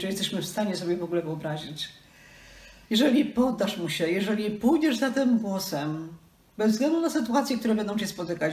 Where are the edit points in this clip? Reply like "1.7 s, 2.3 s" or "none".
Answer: 2.8 s

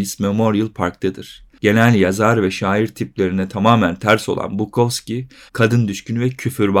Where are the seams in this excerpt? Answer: 5.5 s

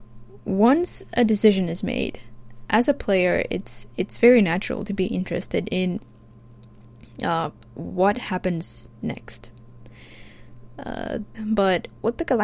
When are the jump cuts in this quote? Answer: 11.3 s

